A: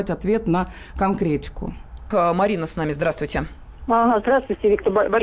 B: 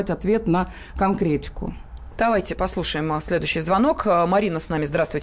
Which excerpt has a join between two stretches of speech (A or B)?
A